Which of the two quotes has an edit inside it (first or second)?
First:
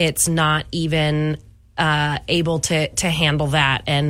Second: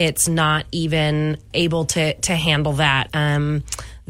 second